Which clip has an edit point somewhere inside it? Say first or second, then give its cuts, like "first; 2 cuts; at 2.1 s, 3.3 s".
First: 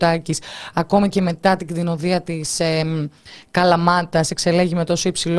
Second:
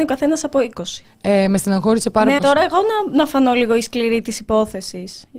second; 2 cuts; at 1.0 s, 2.4 s